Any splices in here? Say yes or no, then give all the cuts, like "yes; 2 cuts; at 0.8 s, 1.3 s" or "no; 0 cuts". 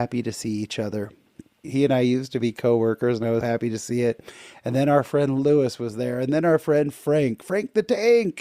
yes; 2 cuts; at 1.6 s, 3.4 s